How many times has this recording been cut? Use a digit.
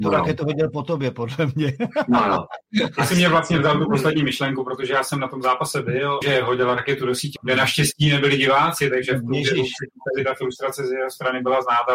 2